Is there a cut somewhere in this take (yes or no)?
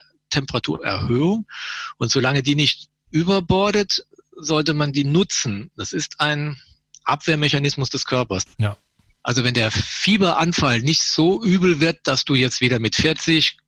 yes